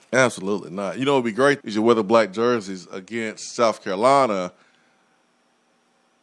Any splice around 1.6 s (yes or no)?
yes